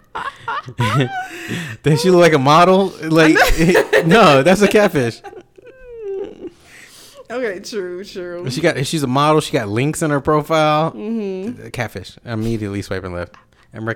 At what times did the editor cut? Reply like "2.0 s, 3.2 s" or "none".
none